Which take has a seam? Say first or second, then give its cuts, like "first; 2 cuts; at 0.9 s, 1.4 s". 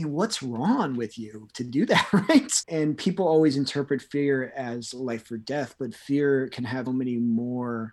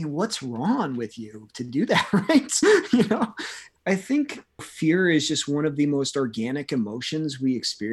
first; 2 cuts; at 2.6 s, 6.9 s